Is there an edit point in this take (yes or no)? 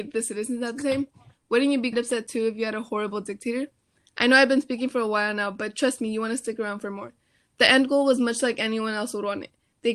yes